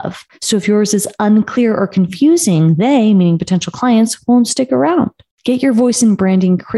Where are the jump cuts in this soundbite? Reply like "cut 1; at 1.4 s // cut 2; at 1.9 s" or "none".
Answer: none